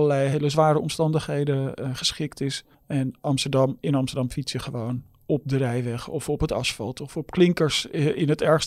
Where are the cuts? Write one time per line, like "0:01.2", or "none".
0:02.7